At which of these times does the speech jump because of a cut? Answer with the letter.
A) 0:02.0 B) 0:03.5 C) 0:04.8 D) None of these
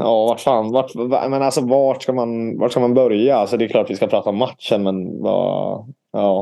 D